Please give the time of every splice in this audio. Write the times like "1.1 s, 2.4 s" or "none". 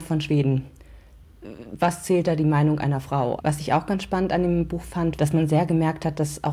3.4 s, 5.2 s